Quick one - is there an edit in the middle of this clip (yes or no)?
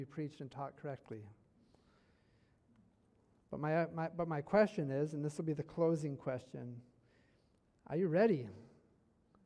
no